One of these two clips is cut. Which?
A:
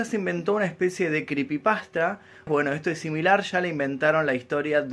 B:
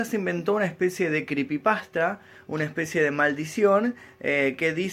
A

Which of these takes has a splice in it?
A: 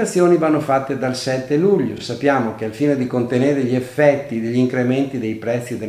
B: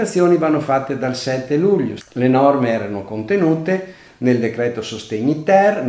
B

